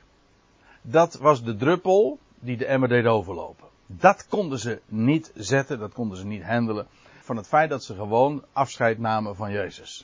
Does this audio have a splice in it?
yes; 2 cuts; at 3.8 s, 7.2 s

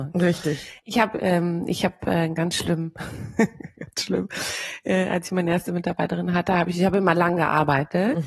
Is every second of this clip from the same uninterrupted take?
yes; 0 cuts

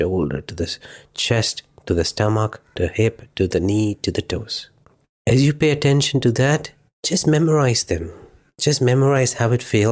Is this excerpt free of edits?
yes; 0 cuts

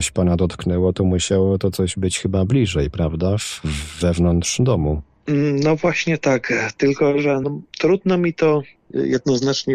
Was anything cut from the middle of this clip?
yes; 1 cut; at 7.4 s

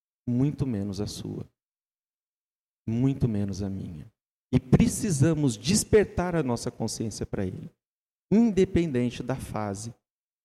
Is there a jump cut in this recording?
yes; 1 cut; at 4.4 s

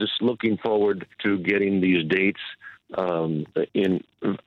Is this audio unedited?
no; 1 cut; at 1.1 s

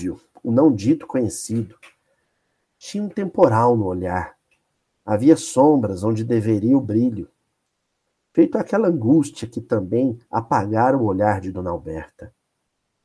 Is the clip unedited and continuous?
yes; 0 cuts

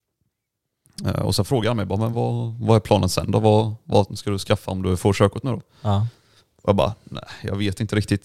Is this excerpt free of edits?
yes; 0 cuts

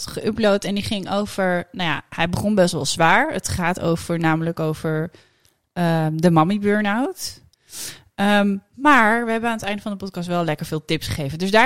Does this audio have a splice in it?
no; 0 cuts

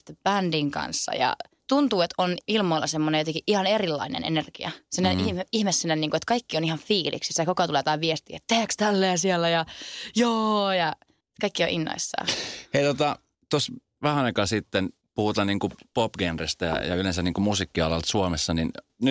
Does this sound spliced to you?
no; 0 cuts

